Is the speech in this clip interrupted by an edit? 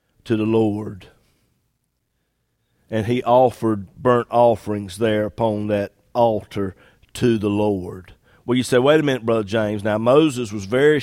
no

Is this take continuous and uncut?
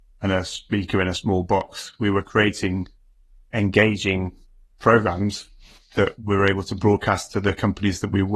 yes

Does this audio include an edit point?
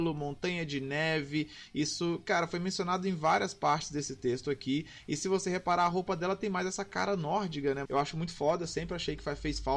yes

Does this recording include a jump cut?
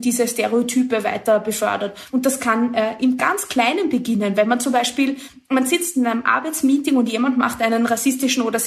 no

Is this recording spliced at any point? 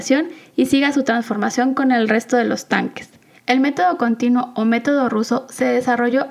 yes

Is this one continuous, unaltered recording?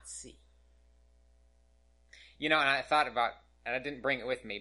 yes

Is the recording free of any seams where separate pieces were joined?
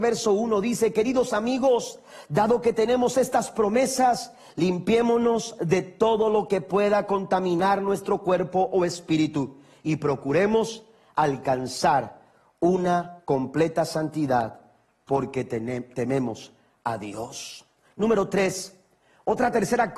yes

